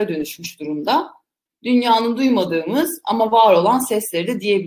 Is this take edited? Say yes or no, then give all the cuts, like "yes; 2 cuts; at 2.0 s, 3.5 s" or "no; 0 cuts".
yes; 1 cut; at 1.5 s